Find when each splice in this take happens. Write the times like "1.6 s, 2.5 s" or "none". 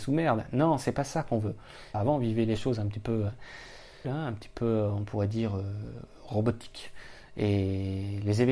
1.9 s, 4.0 s

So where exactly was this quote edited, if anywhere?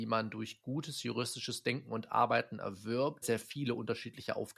3.2 s

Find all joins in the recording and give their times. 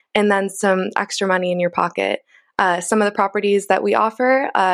none

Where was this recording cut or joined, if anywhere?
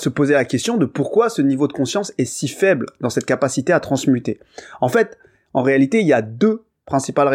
none

